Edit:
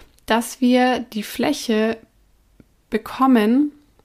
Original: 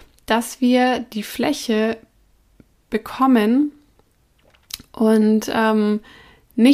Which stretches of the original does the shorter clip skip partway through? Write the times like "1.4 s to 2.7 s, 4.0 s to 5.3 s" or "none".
none